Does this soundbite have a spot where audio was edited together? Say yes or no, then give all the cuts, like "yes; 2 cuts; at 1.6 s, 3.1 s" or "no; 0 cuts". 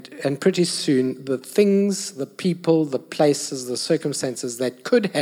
no; 0 cuts